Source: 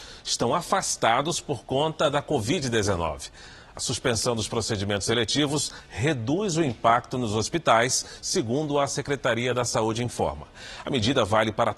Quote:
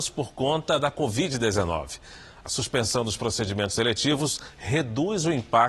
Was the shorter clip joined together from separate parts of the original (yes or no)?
no